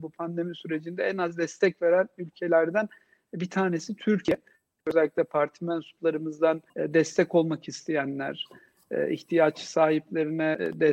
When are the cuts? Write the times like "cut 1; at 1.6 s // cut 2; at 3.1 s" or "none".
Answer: cut 1; at 4.8 s // cut 2; at 6.7 s